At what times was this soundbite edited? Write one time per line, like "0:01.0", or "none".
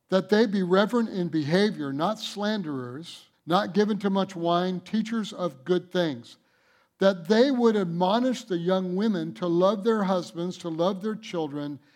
0:03.3